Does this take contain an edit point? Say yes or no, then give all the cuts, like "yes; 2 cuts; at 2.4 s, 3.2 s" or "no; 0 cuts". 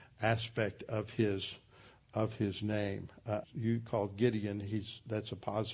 yes; 1 cut; at 3.4 s